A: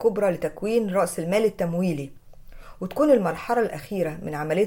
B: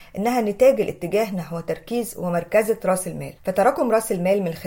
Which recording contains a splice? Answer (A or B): B